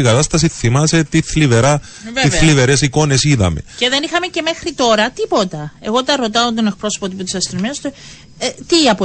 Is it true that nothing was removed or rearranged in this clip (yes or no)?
yes